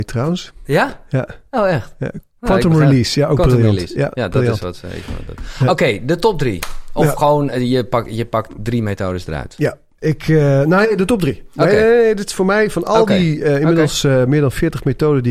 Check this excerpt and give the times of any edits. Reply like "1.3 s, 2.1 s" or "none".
10.0 s